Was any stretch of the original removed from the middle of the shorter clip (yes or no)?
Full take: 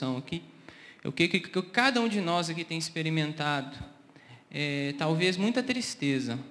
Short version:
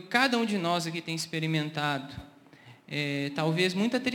no